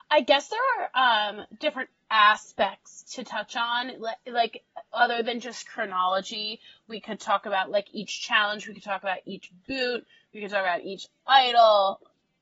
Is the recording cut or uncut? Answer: uncut